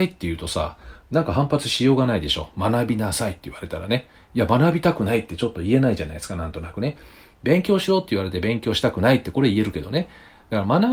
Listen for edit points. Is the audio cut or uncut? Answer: uncut